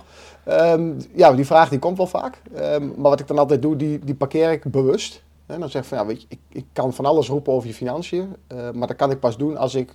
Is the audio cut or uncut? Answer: uncut